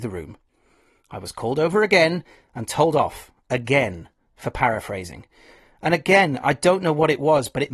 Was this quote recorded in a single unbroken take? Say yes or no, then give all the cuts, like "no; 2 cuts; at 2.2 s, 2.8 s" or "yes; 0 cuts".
yes; 0 cuts